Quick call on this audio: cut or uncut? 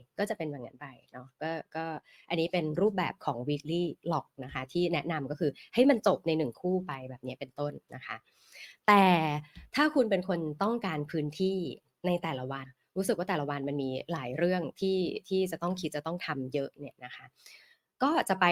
cut